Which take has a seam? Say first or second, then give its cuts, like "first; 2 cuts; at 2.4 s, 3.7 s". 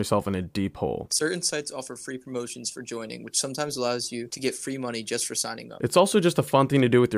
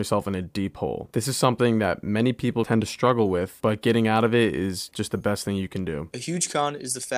first; 1 cut; at 1.1 s